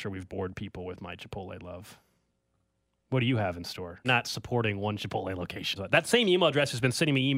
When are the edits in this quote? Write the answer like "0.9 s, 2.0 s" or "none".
4.0 s, 5.8 s